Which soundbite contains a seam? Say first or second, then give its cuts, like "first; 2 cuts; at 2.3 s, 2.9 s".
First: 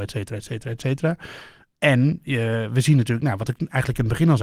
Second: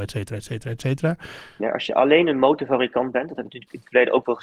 second; 1 cut; at 1.6 s